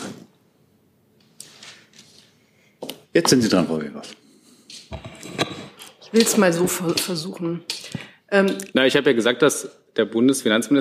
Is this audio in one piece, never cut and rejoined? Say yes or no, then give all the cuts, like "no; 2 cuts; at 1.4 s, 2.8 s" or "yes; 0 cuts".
no; 2 cuts; at 3.0 s, 8.7 s